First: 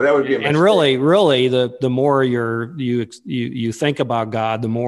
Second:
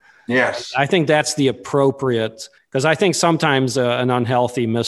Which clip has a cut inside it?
second; 1 cut; at 2.6 s

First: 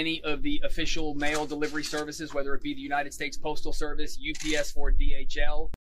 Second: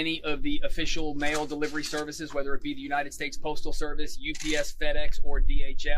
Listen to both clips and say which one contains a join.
first; 1 cut; at 4.7 s

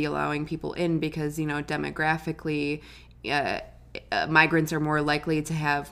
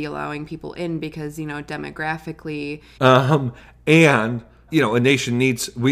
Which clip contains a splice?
second; 2 cuts; at 3.0 s, 4.7 s

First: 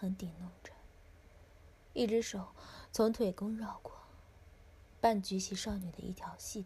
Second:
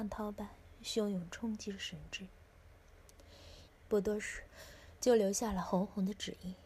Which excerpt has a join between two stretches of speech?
second; 1 cut; at 3.7 s

